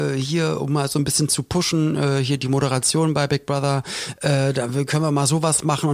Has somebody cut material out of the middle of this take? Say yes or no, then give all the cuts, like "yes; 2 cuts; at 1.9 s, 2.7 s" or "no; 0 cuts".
no; 0 cuts